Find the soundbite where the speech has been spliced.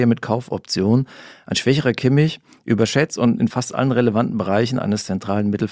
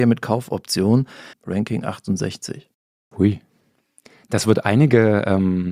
second; 1 cut; at 1.3 s

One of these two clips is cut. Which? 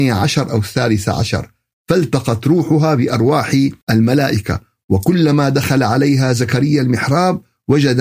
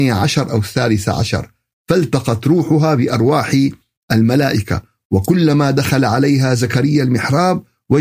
first; 1 cut; at 3.8 s

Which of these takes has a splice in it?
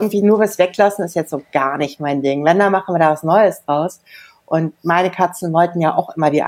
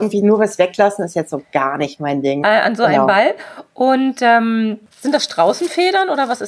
second; 2 cuts; at 2.4 s, 4.9 s

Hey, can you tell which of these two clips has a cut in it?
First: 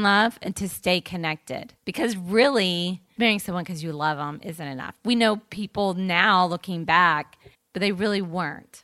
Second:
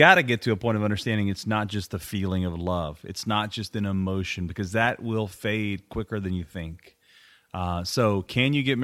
first; 3 cuts; at 1.8 s, 3.2 s, 7.5 s

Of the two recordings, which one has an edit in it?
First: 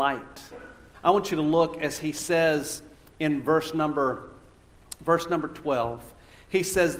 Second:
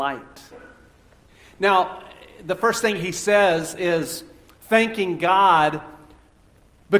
first; 1 cut; at 0.9 s

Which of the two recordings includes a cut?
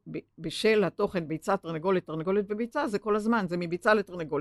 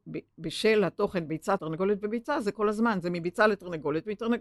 second; 1 cut; at 1.6 s

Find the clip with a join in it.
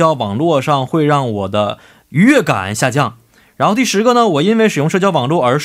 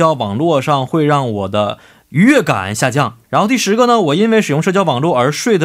second; 1 cut; at 3.2 s

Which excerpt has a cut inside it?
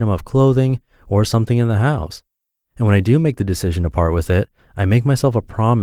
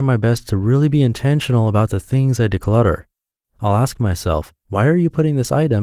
second; 1 cut; at 4.6 s

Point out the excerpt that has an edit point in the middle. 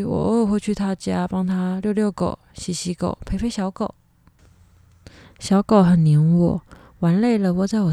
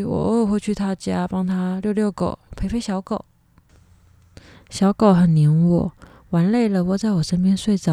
second; 1 cut; at 2.5 s

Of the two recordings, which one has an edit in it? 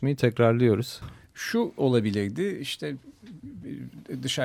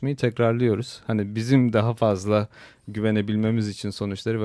first; 2 cuts; at 1.0 s, 3.4 s

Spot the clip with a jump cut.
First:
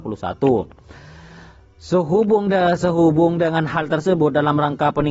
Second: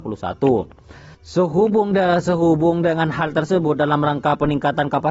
second; 1 cut; at 1.1 s

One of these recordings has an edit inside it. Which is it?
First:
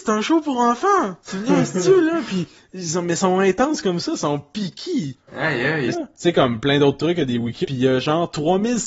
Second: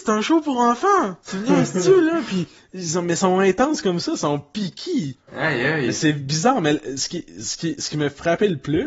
first; 2 cuts; at 5.9 s, 7.6 s

